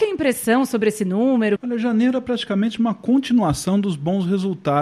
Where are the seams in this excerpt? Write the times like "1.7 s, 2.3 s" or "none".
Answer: 1.6 s